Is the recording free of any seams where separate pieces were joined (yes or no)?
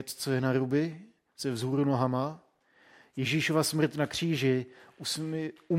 yes